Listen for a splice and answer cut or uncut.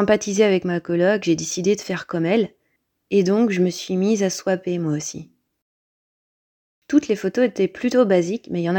uncut